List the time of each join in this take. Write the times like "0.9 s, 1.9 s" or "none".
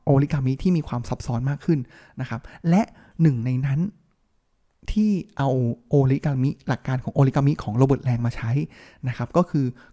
none